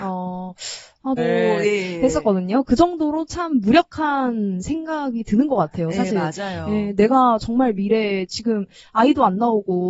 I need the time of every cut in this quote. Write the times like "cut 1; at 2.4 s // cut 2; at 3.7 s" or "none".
cut 1; at 1.2 s

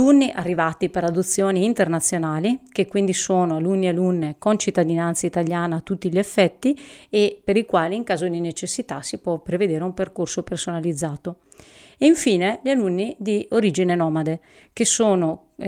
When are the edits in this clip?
none

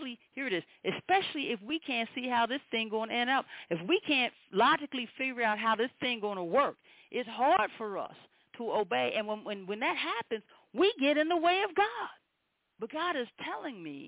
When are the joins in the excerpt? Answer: none

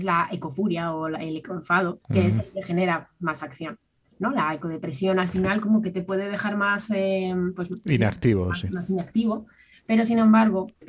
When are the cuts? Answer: cut 1; at 2.0 s

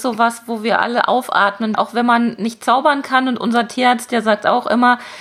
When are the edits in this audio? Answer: cut 1; at 1.7 s

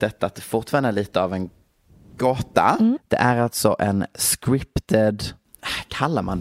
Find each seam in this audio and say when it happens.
cut 1; at 3.0 s

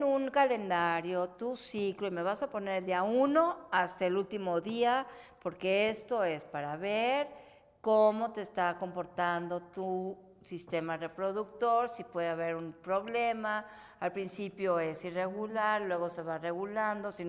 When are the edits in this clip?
none

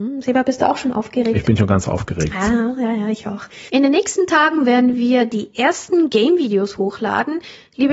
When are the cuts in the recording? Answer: none

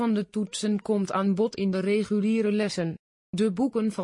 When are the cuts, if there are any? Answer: cut 1; at 3.2 s

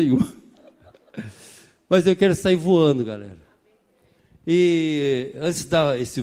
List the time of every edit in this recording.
none

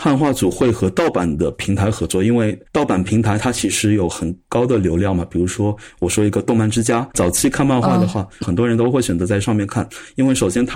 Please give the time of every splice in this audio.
cut 1; at 7.1 s // cut 2; at 8.4 s

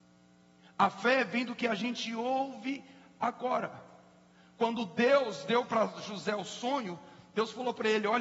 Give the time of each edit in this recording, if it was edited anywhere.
none

